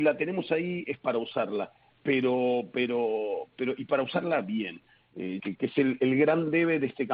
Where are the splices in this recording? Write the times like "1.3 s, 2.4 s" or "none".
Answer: 5.4 s